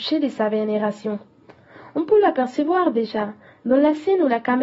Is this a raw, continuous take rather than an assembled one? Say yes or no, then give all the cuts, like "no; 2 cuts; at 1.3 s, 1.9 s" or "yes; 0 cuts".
yes; 0 cuts